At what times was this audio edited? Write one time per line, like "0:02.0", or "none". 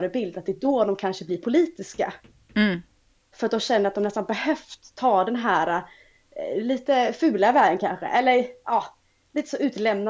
none